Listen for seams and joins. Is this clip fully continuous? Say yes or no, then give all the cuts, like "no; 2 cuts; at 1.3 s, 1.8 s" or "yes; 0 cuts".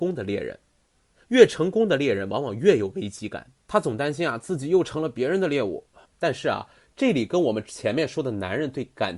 no; 2 cuts; at 3.6 s, 6.0 s